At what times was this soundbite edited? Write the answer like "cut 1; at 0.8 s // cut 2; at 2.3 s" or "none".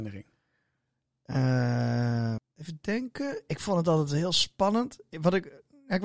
cut 1; at 2.4 s